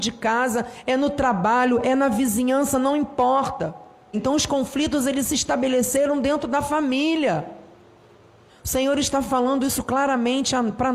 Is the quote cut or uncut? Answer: cut